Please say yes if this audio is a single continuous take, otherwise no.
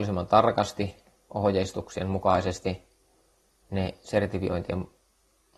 yes